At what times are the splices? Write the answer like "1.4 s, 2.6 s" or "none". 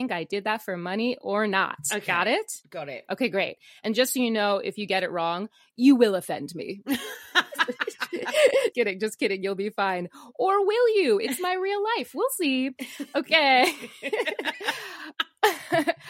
8.7 s